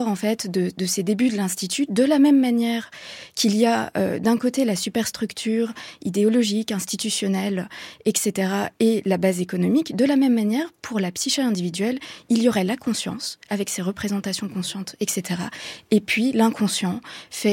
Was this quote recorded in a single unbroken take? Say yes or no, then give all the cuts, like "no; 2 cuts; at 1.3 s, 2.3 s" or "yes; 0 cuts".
yes; 0 cuts